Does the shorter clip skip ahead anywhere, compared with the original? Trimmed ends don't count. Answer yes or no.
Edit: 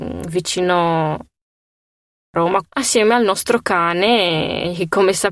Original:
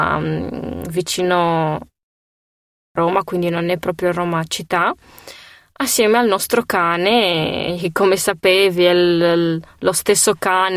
yes